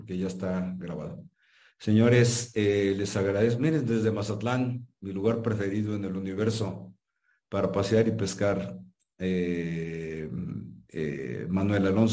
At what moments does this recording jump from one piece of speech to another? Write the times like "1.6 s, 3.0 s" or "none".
none